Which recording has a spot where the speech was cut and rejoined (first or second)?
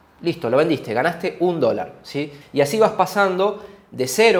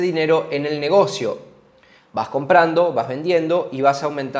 first